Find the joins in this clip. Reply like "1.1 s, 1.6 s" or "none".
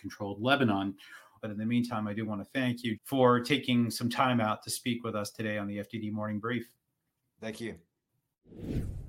1.4 s, 2.9 s